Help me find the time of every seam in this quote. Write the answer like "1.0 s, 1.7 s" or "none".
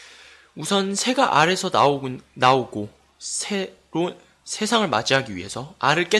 none